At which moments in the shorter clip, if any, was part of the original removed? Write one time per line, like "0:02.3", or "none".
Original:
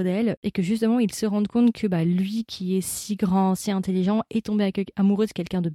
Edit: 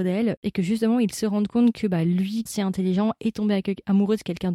0:02.5

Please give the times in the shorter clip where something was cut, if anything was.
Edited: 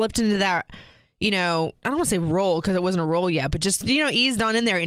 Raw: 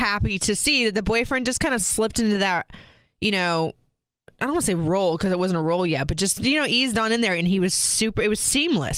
0:01.8

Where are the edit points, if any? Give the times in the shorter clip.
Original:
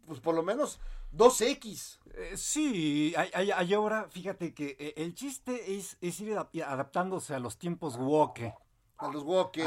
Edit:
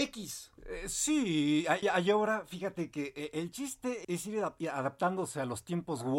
0:01.8
0:04.0

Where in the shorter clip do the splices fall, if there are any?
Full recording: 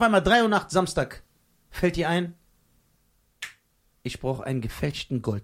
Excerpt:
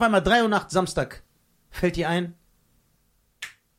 none

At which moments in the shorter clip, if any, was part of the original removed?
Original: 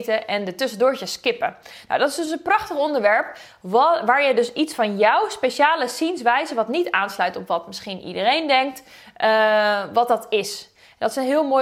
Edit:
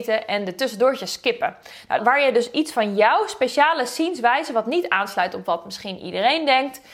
0:02.0

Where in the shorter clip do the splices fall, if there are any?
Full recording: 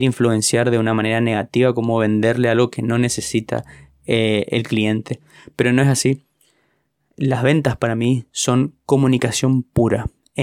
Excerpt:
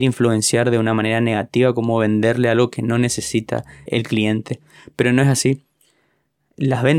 0:03.9

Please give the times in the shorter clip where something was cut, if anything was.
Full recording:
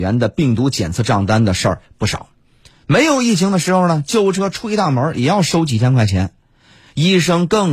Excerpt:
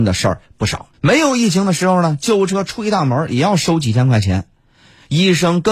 0:00.9

